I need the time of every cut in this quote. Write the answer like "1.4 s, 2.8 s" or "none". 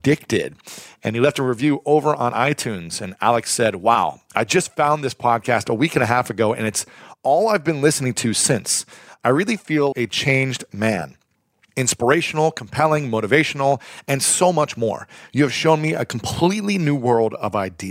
9.9 s